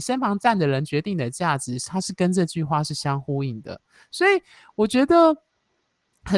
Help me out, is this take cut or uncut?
uncut